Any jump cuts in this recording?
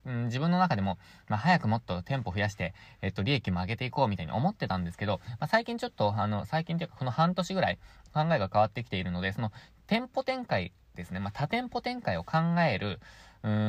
no; 0 cuts

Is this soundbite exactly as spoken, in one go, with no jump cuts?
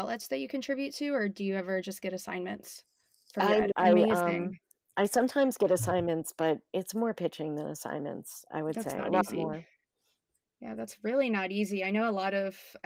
no; 1 cut; at 3.7 s

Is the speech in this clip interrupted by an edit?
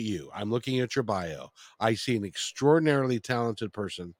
no; 0 cuts

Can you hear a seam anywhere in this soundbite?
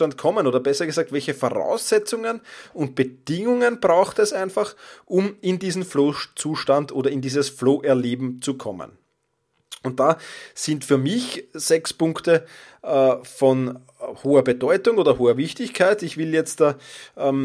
no; 0 cuts

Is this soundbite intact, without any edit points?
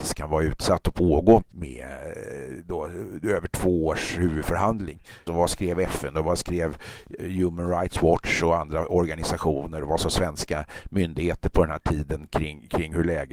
no; 2 cuts; at 1.4 s, 5.3 s

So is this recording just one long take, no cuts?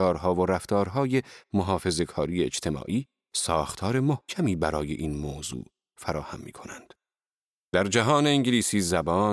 no; 1 cut; at 7.7 s

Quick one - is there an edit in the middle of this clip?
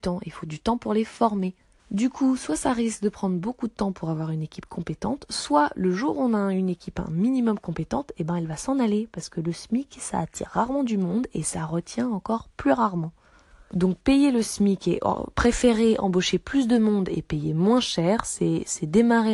no; 0 cuts

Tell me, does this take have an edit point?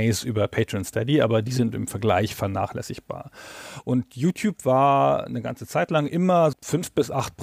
yes; 1 cut; at 6.5 s

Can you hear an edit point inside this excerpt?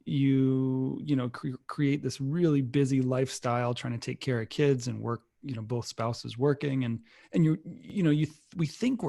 no; 0 cuts

